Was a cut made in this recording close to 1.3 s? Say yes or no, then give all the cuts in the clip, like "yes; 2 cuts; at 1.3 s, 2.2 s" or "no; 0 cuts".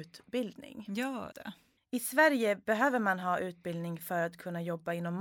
yes; 1 cut; at 1.3 s